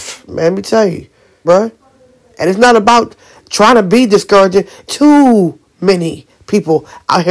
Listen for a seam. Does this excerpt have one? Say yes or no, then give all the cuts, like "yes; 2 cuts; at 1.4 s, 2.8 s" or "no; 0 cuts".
yes; 2 cuts; at 1.4 s, 4.9 s